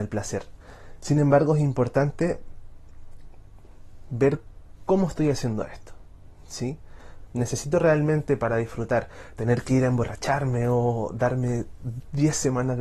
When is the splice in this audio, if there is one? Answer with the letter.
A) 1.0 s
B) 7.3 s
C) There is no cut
B